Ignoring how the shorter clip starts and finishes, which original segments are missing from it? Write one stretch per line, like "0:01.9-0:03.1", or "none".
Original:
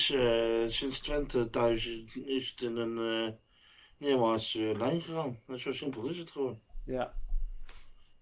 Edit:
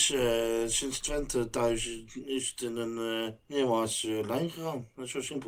0:03.4-0:03.9